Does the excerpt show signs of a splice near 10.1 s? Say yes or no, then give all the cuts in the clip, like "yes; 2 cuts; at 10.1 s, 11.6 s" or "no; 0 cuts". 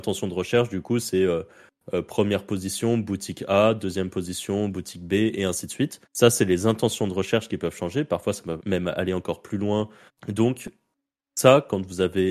yes; 3 cuts; at 6.0 s, 8.6 s, 10.1 s